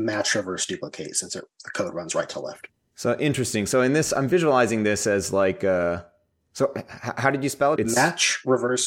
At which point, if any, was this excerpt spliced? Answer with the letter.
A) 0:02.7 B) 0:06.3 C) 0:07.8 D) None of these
C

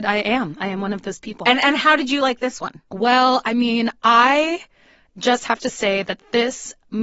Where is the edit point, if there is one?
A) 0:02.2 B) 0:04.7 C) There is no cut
C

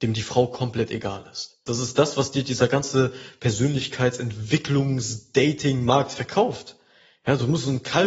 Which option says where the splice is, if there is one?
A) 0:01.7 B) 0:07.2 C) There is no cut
A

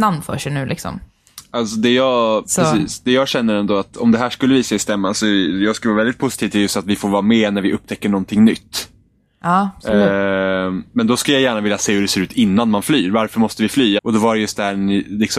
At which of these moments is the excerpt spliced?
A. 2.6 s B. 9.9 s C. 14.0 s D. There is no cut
C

